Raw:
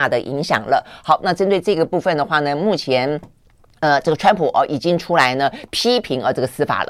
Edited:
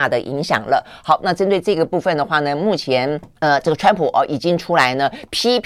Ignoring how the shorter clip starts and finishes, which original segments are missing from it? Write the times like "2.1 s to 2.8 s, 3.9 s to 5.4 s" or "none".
3.3 s to 3.8 s